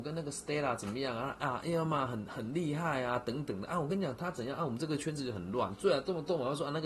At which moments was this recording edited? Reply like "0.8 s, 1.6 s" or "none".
none